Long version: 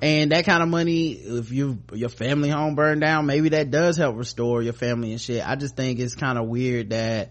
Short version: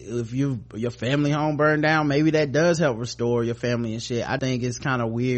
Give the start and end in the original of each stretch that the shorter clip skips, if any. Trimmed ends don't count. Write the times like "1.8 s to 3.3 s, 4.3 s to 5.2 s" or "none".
5.6 s to 5.8 s